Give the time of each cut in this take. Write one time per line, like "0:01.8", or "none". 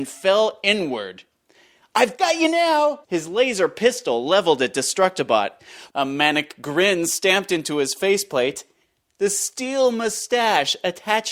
0:03.0
0:05.9